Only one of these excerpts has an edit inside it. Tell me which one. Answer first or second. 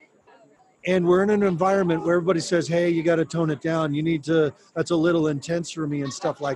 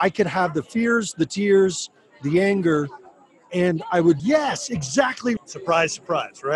second